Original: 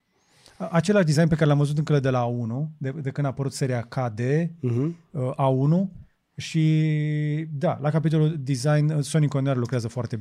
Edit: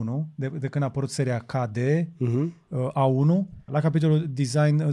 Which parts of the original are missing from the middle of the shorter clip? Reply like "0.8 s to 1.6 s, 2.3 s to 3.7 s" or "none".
6.1 s to 7.8 s